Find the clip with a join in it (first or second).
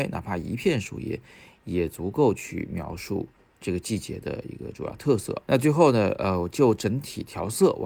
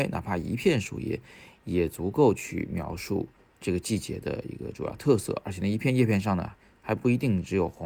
first